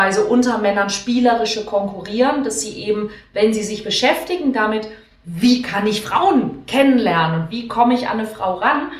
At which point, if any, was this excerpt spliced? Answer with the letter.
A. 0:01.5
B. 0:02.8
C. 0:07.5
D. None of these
D